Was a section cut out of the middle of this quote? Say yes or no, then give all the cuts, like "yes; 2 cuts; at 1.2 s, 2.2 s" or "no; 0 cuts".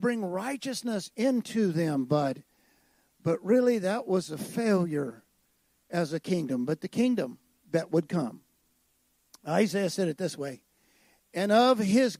no; 0 cuts